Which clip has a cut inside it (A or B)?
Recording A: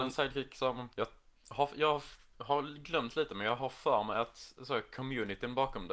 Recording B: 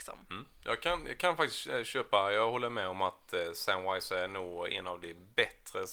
A